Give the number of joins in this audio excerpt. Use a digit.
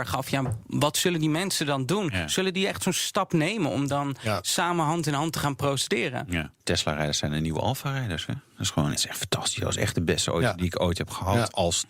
1